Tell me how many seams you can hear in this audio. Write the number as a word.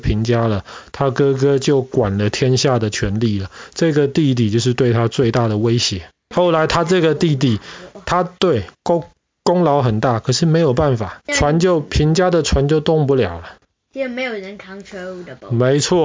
two